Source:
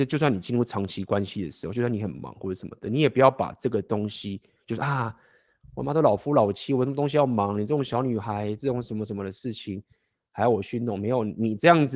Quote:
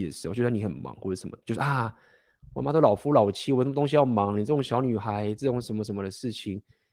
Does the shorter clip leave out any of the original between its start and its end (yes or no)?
yes